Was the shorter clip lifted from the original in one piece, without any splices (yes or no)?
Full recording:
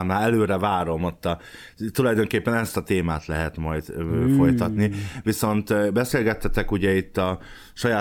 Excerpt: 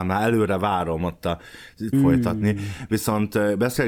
no